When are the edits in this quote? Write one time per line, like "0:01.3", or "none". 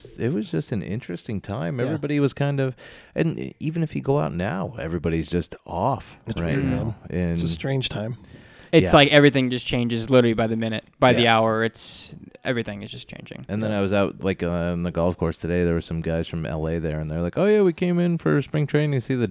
none